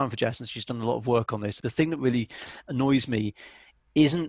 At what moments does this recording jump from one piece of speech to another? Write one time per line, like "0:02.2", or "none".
0:01.6